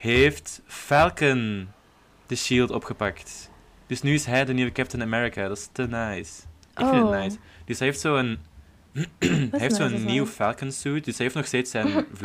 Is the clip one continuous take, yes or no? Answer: yes